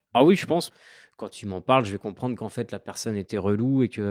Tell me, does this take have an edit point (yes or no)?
no